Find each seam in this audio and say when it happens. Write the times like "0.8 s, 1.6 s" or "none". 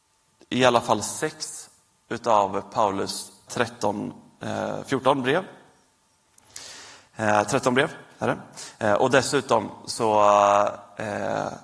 3.5 s